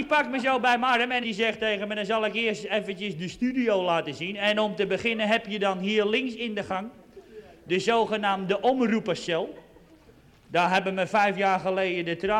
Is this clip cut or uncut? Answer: uncut